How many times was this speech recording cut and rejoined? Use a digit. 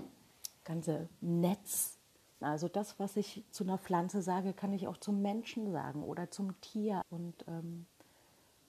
2